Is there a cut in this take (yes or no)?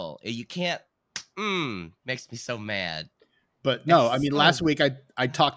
yes